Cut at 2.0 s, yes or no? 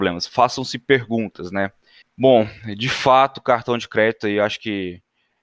yes